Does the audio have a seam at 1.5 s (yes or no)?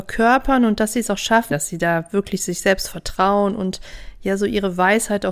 yes